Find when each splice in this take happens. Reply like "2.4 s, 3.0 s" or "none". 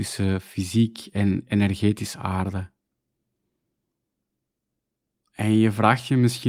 none